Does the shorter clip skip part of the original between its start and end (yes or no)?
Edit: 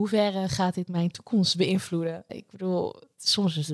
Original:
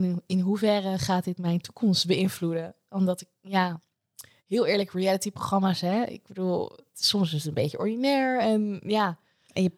yes